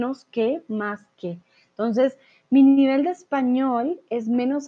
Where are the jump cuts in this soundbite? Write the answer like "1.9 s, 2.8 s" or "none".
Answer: none